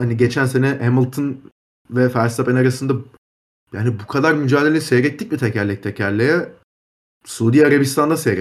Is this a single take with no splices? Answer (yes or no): yes